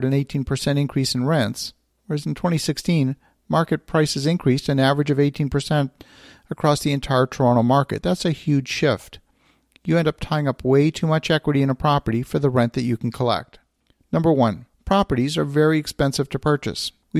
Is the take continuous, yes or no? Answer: no